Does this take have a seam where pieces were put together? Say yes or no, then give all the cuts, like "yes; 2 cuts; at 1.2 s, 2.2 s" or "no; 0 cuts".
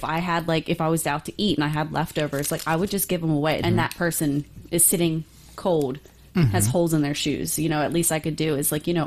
yes; 1 cut; at 3.6 s